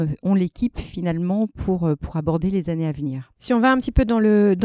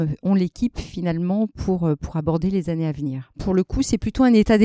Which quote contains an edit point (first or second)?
second